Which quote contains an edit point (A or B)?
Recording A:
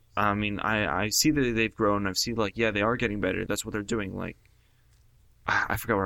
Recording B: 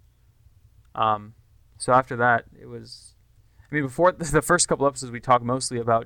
A